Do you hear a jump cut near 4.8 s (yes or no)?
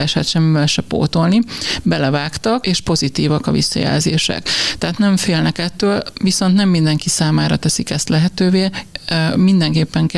no